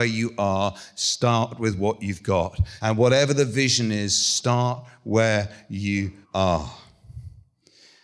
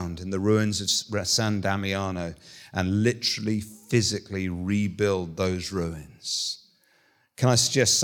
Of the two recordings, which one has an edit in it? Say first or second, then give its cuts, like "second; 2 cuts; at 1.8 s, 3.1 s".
first; 2 cuts; at 2.8 s, 6.2 s